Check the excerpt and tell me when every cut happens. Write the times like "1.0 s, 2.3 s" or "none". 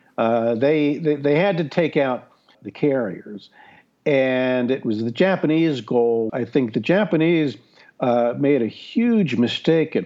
2.5 s, 6.3 s